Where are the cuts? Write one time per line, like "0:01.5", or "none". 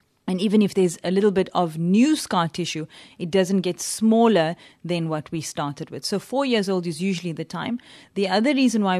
none